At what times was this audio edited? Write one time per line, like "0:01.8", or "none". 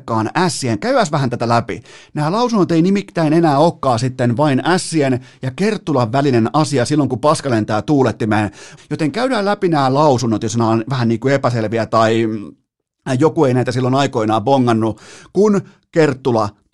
0:08.8